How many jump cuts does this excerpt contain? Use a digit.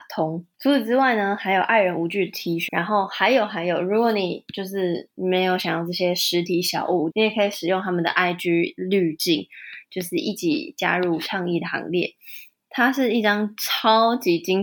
3